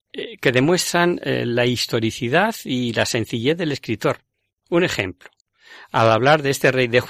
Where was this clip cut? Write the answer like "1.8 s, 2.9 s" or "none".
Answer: none